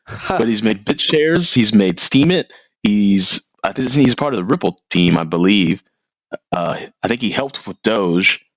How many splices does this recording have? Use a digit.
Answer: 0